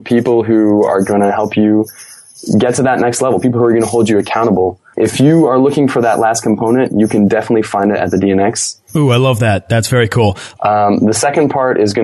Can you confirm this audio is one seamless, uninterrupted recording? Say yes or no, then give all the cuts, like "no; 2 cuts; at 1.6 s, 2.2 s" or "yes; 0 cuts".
no; 2 cuts; at 8.9 s, 10.5 s